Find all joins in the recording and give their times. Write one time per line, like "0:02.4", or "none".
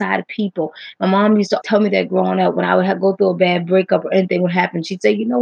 0:01.6